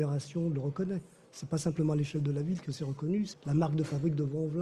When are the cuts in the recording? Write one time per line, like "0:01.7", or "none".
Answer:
0:03.3